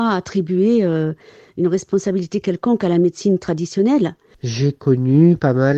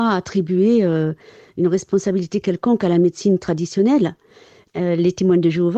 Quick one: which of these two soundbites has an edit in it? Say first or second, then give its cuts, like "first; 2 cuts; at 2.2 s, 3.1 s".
first; 1 cut; at 4.3 s